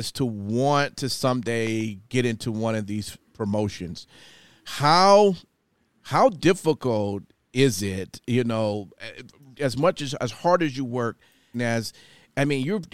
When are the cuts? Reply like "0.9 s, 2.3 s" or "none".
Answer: 9.5 s, 11.5 s